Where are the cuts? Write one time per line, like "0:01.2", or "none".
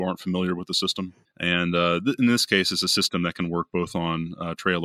0:01.2

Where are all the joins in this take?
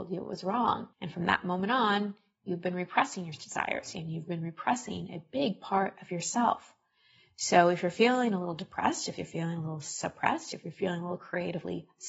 0:00.9
0:03.9

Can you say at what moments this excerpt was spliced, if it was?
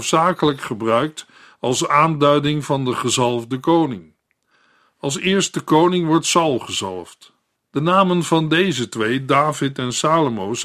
0:07.6

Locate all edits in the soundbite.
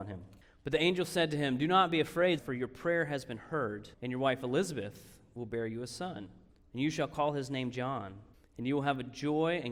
0:02.4
0:03.9

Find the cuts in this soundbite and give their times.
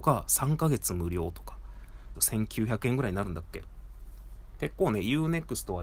0:02.1

